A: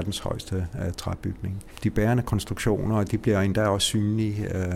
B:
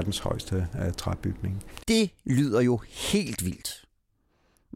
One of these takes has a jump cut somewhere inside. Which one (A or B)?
B